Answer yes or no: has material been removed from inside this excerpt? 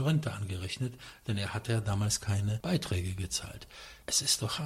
no